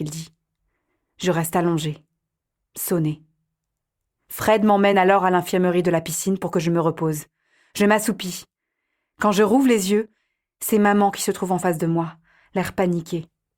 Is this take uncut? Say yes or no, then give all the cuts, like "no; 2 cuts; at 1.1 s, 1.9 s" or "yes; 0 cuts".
yes; 0 cuts